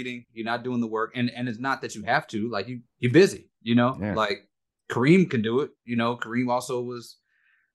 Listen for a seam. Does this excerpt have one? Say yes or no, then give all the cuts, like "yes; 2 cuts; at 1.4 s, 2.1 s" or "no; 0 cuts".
no; 0 cuts